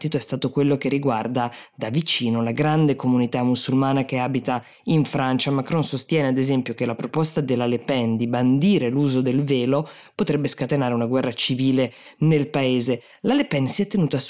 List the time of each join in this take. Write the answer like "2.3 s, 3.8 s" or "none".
none

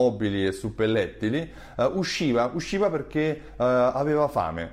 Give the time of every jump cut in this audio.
none

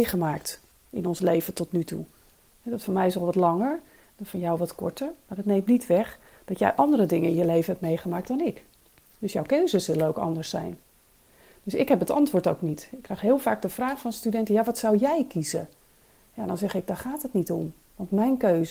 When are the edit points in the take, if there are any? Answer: none

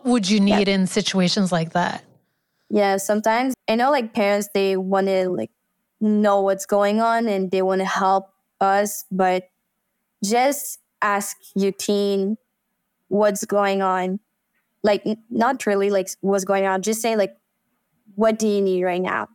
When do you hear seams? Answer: 3.5 s

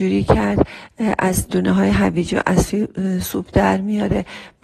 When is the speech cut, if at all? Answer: 1.5 s

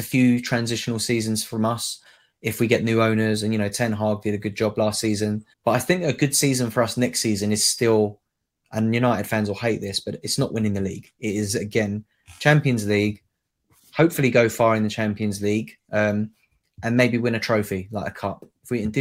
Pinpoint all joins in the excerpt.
5.5 s

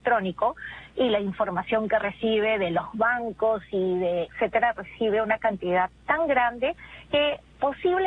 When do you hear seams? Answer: 4.3 s

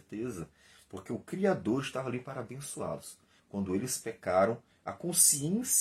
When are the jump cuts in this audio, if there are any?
none

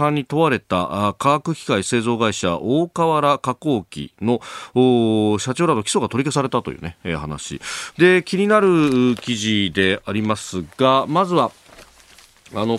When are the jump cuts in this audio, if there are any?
7.9 s

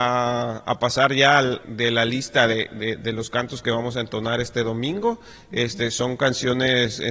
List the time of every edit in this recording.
1.6 s

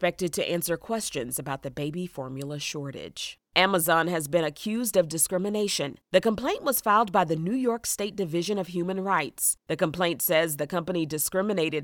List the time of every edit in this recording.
3.4 s

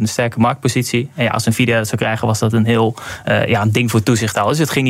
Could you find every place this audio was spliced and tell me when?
none

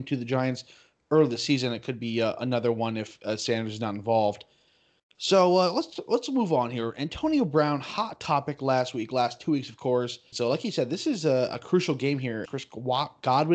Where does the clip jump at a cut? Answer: 10.3 s, 12.5 s

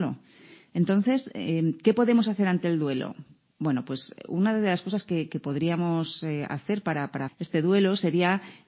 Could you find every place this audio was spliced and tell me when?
7.3 s

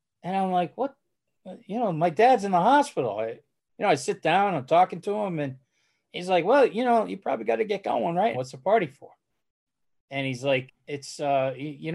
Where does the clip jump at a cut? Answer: 8.3 s, 10.7 s

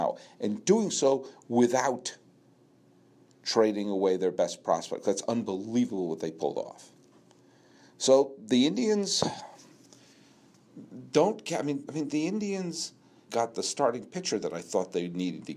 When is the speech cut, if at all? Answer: 11.9 s, 13.3 s

